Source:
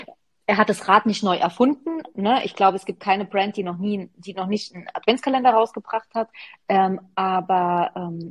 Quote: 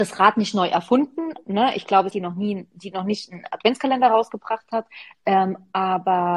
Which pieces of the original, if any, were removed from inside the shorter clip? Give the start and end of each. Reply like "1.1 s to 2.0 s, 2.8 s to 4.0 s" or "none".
2.8 s to 3.5 s